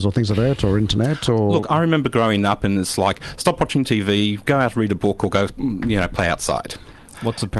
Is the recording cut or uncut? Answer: uncut